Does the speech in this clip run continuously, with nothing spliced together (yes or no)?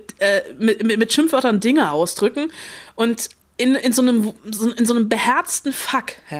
yes